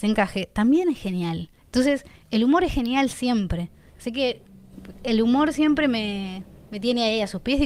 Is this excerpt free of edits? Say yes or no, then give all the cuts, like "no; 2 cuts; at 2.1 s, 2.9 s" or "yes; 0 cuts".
no; 1 cut; at 1.6 s